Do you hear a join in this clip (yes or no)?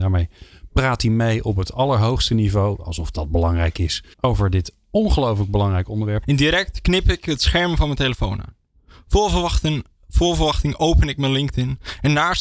yes